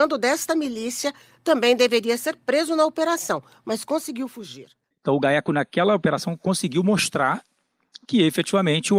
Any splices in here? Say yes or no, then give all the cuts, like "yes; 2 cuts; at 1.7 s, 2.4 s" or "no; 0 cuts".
yes; 1 cut; at 4.9 s